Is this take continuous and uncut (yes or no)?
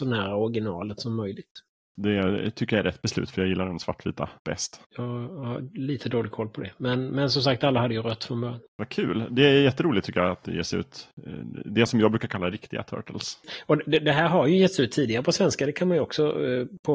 no